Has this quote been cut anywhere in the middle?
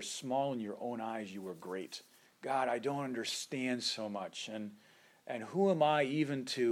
yes; 1 cut; at 2.2 s

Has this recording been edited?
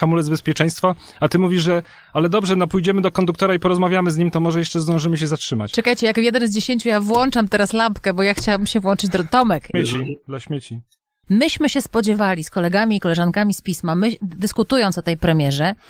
yes; 2 cuts; at 9.7 s, 11.2 s

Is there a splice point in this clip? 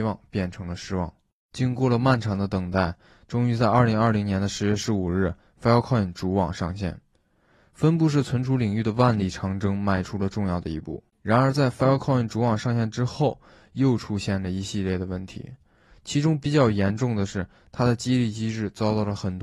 yes; 1 cut; at 11.1 s

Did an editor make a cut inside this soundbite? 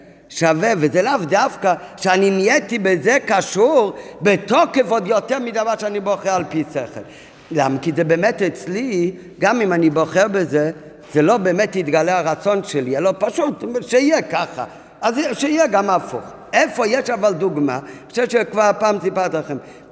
no; 0 cuts

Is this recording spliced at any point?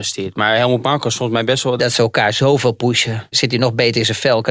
yes; 2 cuts; at 1.8 s, 3.3 s

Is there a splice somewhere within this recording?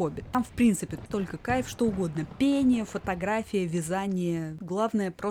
yes; 1 cut; at 1.1 s

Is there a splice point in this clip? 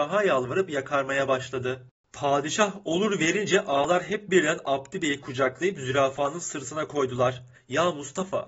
yes; 1 cut; at 7.5 s

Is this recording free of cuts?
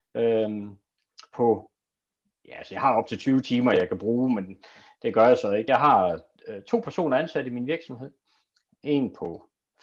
yes; 0 cuts

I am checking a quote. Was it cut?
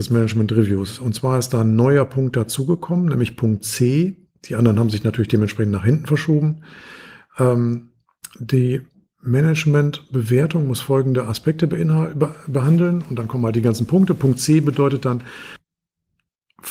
no; 0 cuts

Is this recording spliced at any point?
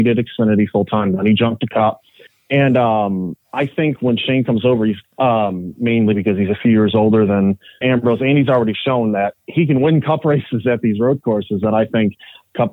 yes; 2 cuts; at 5.0 s, 7.8 s

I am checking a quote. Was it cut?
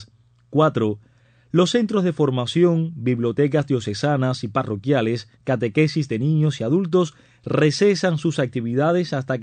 yes; 1 cut; at 5.3 s

